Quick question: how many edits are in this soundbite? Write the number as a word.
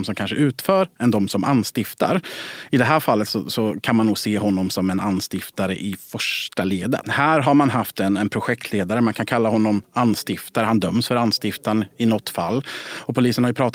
one